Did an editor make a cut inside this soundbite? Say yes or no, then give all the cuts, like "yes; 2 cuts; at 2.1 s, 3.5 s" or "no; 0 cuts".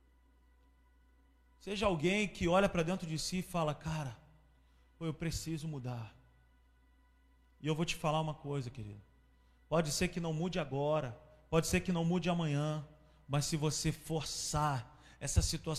no; 0 cuts